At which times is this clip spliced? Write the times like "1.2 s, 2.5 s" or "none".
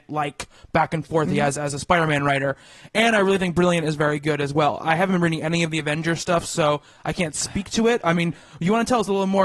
none